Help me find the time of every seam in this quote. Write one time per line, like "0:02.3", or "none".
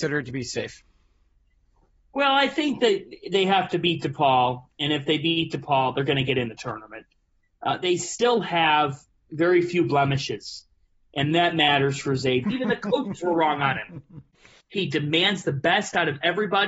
0:12.4
0:14.6